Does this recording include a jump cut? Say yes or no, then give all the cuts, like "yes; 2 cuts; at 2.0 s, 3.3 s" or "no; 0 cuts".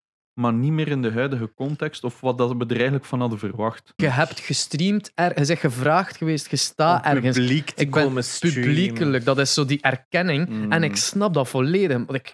yes; 1 cut; at 4.0 s